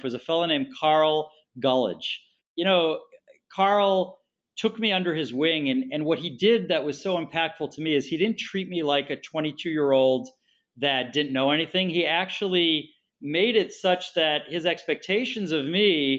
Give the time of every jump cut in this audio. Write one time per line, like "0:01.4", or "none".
none

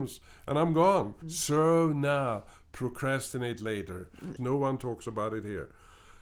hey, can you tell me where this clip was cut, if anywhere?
0:01.2
0:04.4

